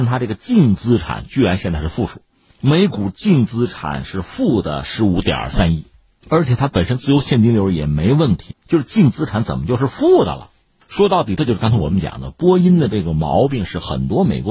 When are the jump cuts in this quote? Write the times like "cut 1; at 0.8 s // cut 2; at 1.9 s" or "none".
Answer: cut 1; at 8.5 s // cut 2; at 11.4 s